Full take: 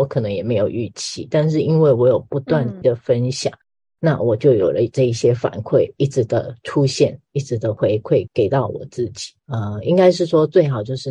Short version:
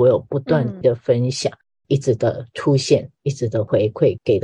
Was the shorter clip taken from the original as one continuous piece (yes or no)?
no